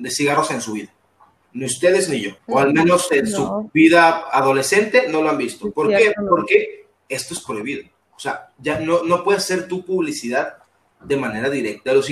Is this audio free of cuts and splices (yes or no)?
no